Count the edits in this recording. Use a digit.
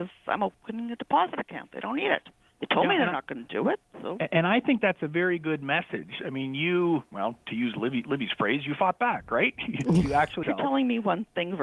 1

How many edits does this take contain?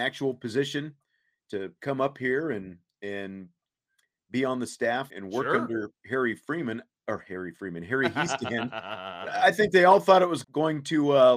2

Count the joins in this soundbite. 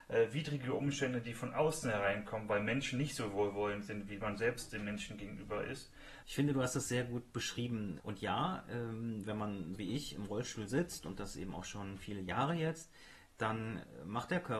3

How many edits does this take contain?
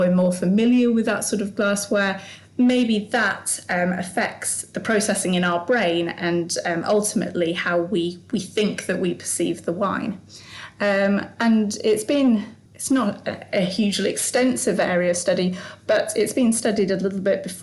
0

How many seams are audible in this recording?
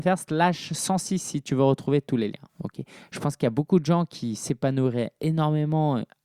1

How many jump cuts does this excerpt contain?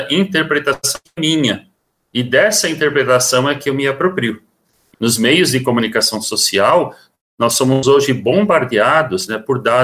1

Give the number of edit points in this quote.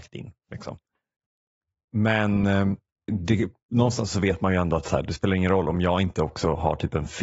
1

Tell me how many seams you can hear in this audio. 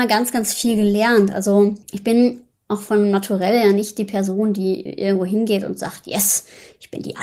1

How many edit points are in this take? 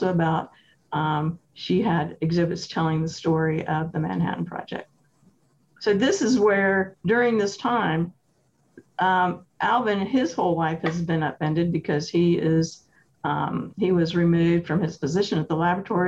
0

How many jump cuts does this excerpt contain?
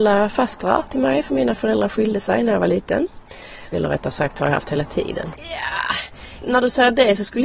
3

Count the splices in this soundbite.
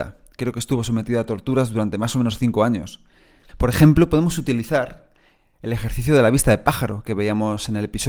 1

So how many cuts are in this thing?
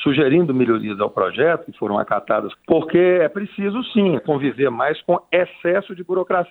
2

